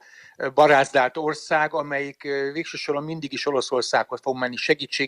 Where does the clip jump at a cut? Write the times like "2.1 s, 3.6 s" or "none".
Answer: none